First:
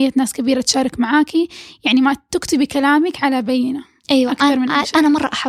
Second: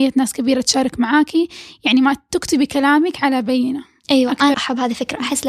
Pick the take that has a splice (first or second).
second